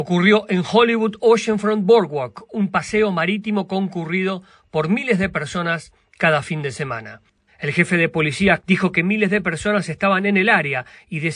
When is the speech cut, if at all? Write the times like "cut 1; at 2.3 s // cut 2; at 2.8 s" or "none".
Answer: cut 1; at 7.5 s // cut 2; at 8.6 s

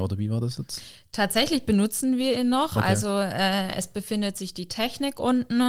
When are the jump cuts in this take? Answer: none

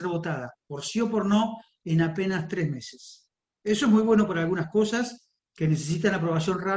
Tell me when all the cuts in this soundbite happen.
none

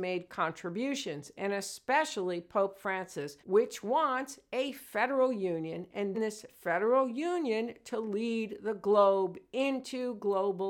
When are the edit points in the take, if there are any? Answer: cut 1; at 3.4 s // cut 2; at 6.1 s

